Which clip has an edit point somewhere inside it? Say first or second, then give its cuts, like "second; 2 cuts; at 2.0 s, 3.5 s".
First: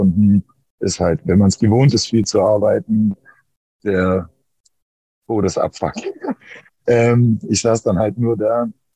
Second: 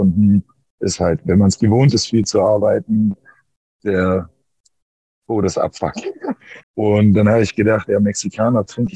second; 1 cut; at 6.6 s